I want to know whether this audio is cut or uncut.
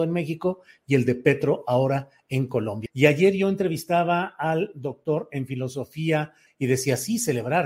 cut